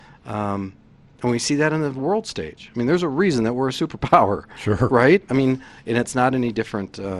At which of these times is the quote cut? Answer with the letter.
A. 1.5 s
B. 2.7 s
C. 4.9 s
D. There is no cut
D